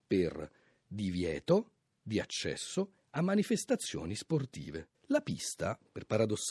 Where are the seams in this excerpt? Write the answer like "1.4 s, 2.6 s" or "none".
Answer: 4.9 s